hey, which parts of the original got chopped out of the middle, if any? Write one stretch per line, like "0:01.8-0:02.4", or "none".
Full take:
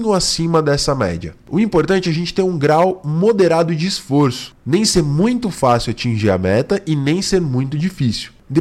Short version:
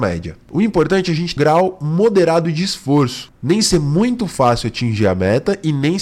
0:02.3-0:02.6